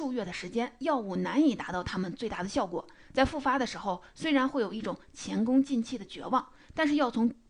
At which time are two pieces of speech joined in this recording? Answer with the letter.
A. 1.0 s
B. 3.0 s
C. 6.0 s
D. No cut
B